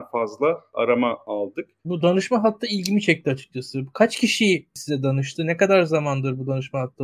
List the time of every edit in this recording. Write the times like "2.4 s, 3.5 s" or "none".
1.8 s